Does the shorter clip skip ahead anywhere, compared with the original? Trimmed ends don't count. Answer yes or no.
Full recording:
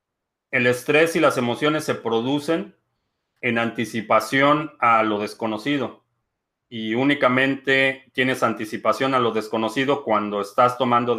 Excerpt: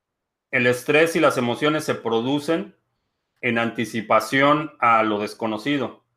no